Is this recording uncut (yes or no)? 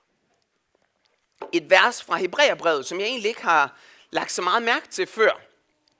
yes